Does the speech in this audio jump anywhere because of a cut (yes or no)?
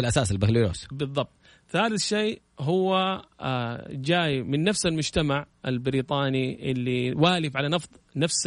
no